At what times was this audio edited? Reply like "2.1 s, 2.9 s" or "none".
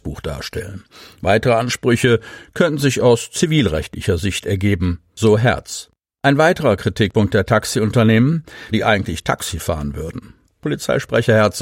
8.7 s, 10.5 s